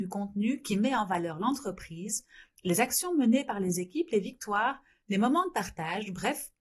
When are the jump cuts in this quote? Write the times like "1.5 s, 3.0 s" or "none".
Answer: none

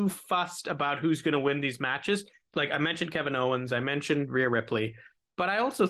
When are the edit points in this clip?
2.5 s

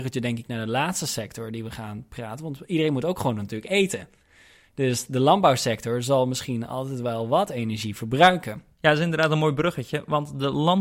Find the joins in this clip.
none

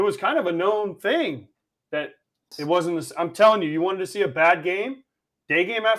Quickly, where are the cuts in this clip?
2.5 s

